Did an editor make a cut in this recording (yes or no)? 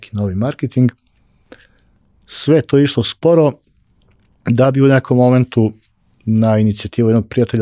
no